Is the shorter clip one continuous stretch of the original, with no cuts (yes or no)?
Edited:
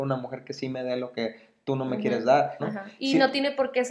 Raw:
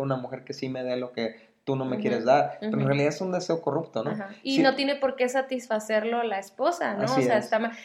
no